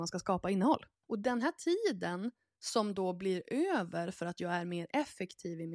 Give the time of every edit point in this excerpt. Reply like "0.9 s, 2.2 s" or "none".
1.0 s